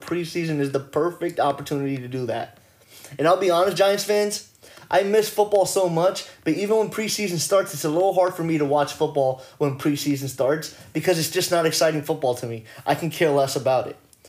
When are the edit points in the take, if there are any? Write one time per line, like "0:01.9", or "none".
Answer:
none